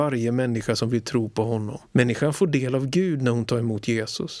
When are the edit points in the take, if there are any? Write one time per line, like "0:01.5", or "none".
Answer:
0:01.9